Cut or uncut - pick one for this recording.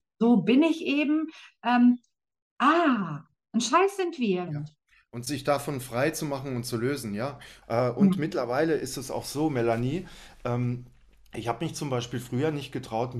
cut